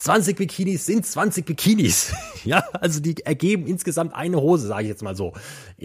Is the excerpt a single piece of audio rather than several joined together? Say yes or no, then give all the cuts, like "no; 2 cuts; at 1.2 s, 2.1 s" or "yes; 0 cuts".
yes; 0 cuts